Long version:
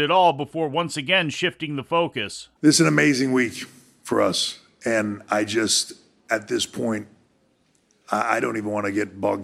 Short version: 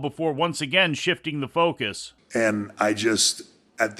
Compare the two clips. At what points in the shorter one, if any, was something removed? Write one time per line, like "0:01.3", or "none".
0:02.2